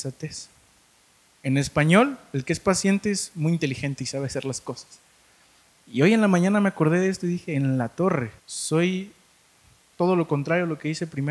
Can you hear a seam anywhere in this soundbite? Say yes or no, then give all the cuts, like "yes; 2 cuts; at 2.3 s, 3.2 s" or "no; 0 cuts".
yes; 2 cuts; at 5.7 s, 8.4 s